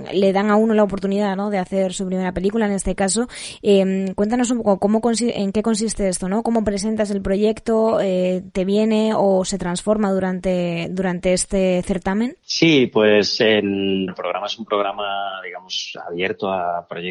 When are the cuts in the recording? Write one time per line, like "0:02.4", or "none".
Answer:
0:12.4
0:14.1